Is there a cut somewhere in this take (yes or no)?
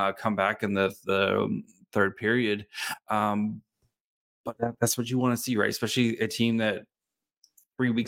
no